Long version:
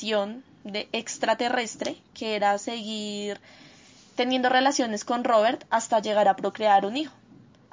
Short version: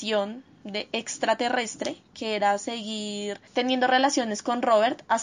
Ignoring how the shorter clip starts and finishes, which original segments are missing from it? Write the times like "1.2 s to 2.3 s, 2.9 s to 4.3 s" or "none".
3.5 s to 4.1 s

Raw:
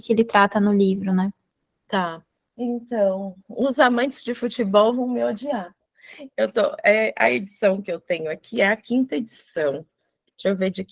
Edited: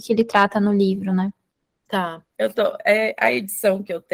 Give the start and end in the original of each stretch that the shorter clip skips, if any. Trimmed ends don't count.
2.4 s to 6.3 s

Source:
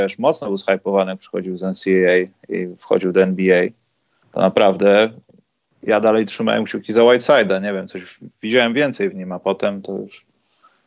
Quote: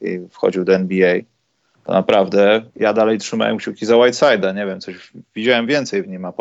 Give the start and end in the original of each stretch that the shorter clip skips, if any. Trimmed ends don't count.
5.1 s to 5.7 s

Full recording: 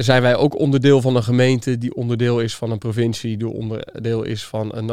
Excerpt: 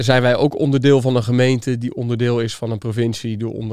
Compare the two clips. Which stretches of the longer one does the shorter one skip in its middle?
none

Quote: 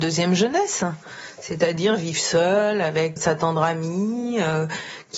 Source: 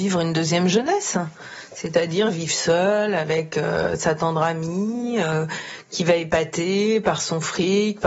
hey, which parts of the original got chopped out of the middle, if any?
3.5 s to 4.0 s

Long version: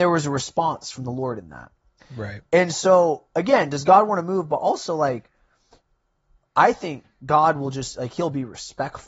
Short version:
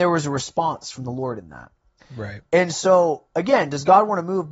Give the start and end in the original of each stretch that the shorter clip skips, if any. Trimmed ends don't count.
none

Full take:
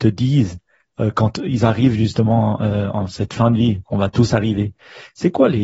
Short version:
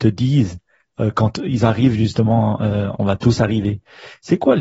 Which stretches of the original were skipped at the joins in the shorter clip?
2.9 s to 3.9 s

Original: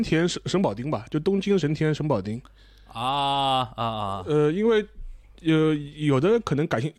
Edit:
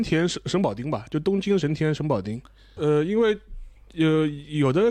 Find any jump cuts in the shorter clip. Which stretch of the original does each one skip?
2.8 s to 4.2 s

